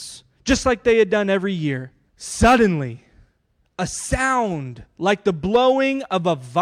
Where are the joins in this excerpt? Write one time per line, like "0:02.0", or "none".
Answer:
0:02.1